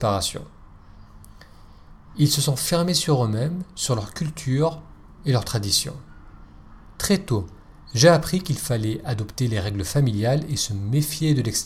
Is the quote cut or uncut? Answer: uncut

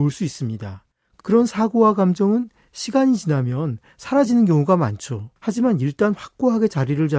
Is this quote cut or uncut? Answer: cut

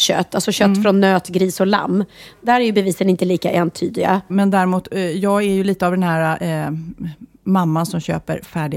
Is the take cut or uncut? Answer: cut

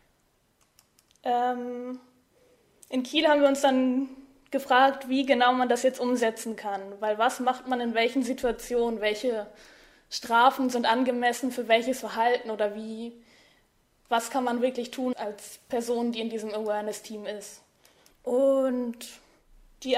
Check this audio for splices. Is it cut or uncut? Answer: cut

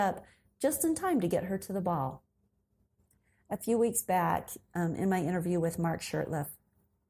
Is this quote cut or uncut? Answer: uncut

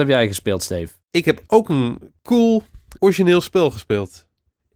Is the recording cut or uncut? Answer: cut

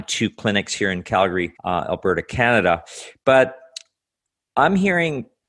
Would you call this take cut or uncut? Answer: cut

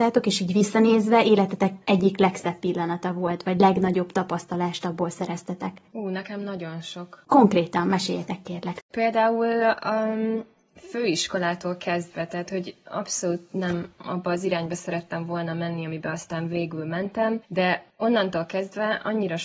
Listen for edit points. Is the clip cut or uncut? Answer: cut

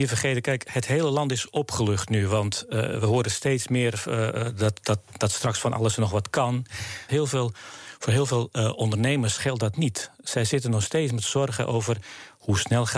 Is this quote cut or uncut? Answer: cut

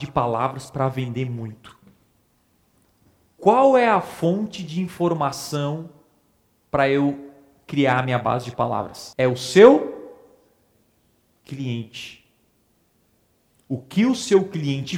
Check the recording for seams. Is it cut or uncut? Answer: uncut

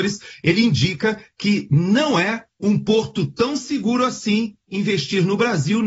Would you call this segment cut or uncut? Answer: uncut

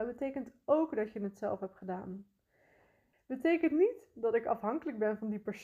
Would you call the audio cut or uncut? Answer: cut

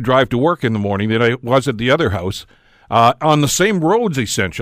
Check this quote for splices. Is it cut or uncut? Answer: uncut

